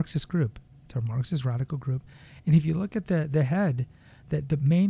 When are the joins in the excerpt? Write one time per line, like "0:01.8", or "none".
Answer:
none

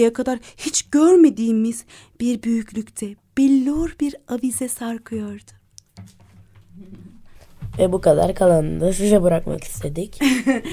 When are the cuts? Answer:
none

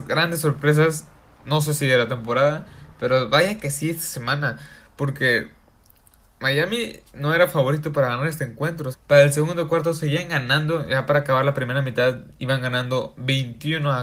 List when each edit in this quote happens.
0:08.9

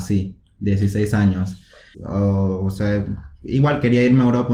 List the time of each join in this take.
0:01.9

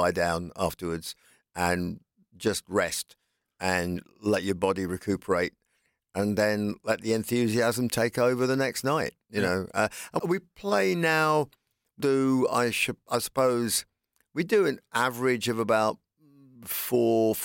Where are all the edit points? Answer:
0:10.2
0:12.0

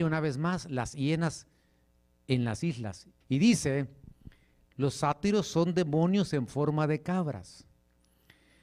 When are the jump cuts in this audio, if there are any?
0:03.2
0:04.7

